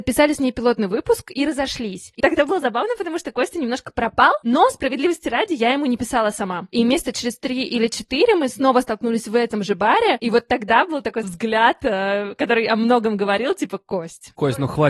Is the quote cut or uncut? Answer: cut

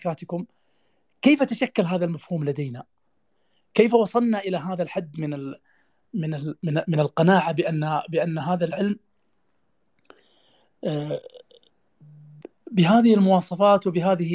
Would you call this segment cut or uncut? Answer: uncut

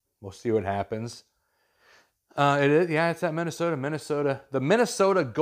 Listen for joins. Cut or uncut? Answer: uncut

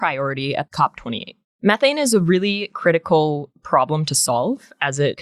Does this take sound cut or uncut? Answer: uncut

